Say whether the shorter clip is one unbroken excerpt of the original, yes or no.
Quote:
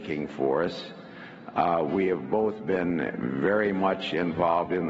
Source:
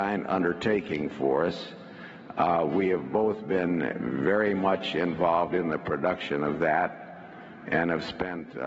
yes